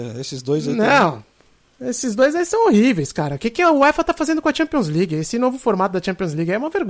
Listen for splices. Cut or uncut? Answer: uncut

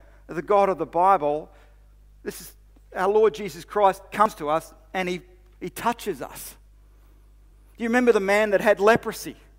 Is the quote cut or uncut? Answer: uncut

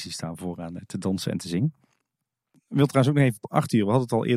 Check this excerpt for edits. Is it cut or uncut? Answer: uncut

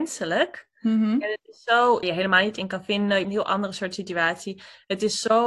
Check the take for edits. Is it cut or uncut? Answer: cut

